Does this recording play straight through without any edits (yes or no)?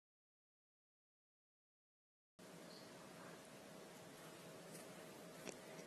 yes